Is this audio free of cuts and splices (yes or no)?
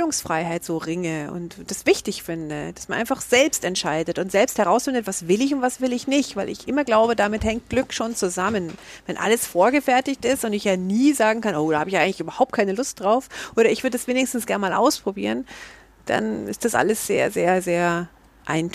yes